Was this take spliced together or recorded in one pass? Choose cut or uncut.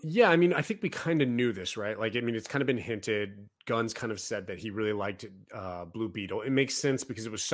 uncut